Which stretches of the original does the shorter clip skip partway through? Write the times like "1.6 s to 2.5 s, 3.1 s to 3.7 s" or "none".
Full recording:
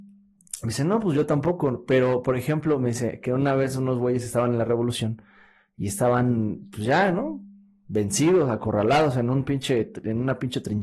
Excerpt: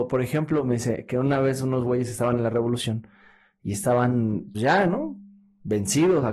6.7 s to 6.8 s

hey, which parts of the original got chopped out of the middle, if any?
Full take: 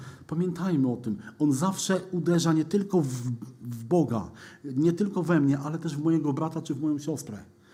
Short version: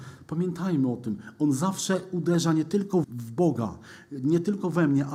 3.0 s to 3.6 s

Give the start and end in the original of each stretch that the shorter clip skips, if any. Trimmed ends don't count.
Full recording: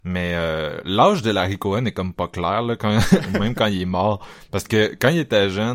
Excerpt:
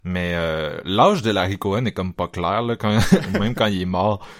none

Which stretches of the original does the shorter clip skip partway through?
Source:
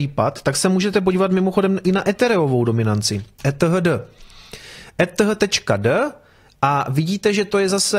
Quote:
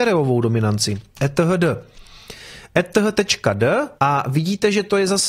6.2 s to 6.6 s

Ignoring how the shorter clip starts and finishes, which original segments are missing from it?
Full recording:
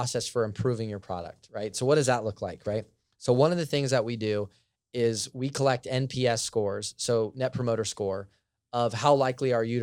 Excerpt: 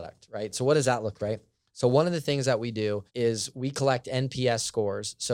2.4 s to 2.6 s, 4.5 s to 4.9 s

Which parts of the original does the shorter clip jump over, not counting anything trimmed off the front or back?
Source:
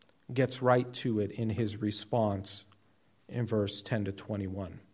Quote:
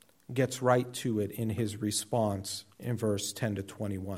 2.7 s to 3.2 s

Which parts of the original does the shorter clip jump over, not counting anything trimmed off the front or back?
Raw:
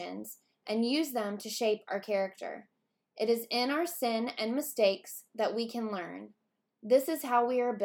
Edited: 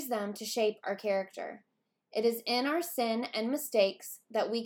none

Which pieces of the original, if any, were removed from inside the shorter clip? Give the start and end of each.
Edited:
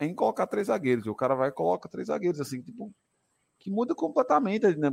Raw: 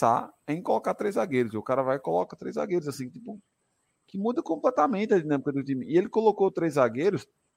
none

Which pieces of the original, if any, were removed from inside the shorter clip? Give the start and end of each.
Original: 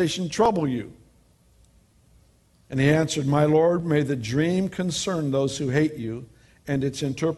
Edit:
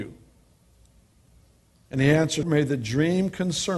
3.2 s to 3.8 s

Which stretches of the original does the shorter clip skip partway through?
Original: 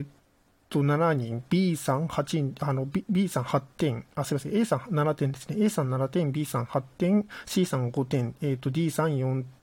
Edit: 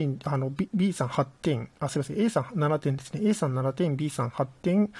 none

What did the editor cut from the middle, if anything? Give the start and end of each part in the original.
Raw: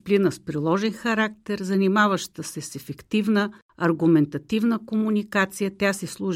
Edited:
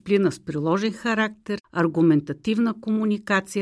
1.6 s to 3.6 s

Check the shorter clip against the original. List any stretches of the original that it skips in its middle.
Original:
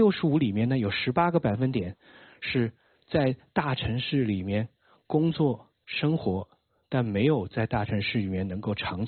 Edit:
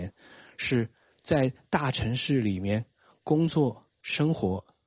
none

